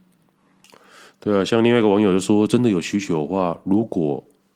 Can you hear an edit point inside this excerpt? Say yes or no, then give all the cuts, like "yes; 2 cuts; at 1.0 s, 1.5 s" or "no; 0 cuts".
no; 0 cuts